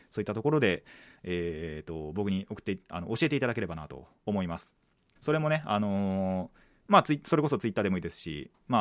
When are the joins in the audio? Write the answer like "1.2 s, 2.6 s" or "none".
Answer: 5.2 s, 6.8 s